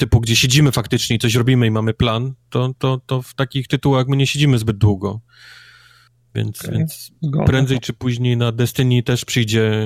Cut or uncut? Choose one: uncut